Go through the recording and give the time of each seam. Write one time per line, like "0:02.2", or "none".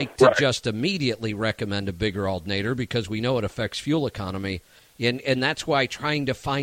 0:04.8